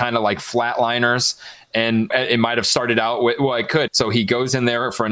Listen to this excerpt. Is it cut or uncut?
cut